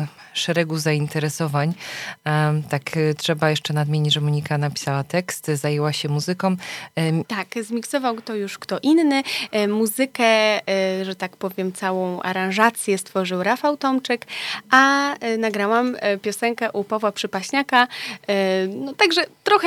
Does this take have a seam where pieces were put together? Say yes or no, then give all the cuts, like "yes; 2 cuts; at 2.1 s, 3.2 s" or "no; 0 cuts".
yes; 1 cut; at 7.2 s